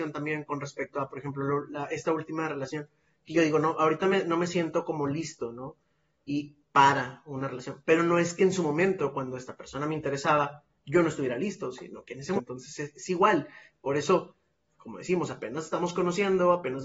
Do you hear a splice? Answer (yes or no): yes